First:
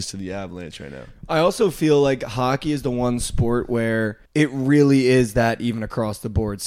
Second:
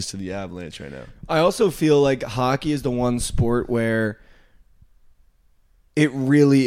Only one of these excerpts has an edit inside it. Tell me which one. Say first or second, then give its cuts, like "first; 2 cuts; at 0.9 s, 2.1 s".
first; 1 cut; at 4.3 s